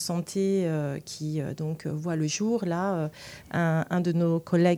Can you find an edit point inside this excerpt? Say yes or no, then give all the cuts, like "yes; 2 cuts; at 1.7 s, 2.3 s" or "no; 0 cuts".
no; 0 cuts